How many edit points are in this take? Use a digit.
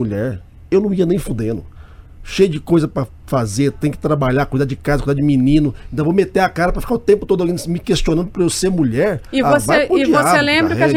0